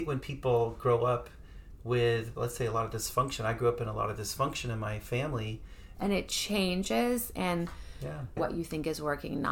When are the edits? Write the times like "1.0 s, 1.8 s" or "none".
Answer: 5.9 s, 8.4 s